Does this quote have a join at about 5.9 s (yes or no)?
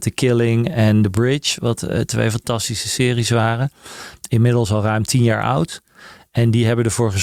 no